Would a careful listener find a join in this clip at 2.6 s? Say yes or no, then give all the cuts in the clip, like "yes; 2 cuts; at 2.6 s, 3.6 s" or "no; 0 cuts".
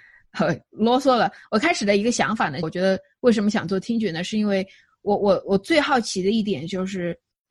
yes; 1 cut; at 2.6 s